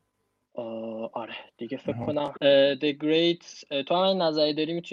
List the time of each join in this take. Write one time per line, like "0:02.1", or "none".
0:02.4